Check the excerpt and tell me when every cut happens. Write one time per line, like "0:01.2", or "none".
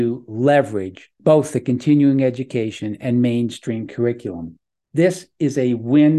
0:01.2

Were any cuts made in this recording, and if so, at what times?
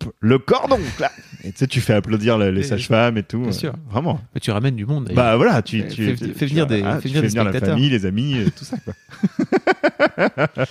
none

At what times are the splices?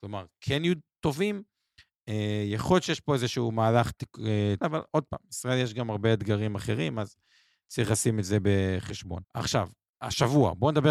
0:04.6
0:09.2

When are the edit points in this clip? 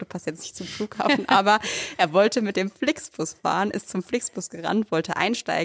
none

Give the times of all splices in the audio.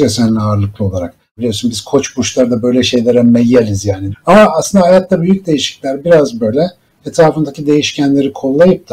0:01.4
0:04.1

